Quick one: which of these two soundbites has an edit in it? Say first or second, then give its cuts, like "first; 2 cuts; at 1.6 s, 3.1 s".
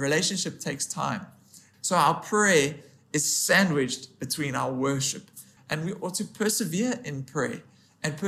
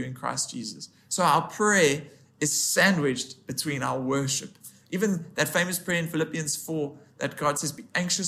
first; 2 cuts; at 1.7 s, 5.6 s